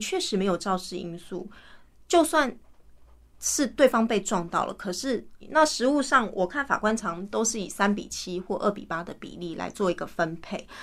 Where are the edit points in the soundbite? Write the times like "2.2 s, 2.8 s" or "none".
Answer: 5.4 s, 7.0 s